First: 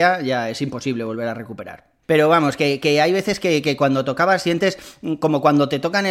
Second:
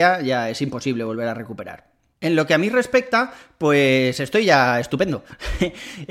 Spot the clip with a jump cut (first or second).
first